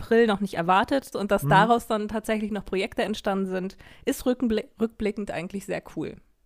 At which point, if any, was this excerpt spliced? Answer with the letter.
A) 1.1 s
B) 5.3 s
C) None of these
A